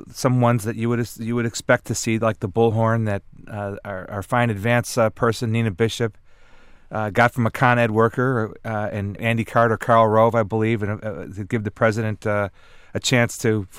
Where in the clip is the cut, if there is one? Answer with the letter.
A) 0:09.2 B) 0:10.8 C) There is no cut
A